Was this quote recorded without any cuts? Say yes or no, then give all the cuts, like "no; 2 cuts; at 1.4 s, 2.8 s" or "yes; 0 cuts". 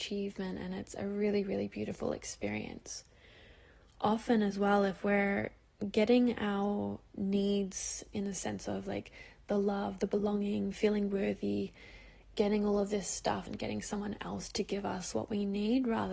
no; 1 cut; at 13.5 s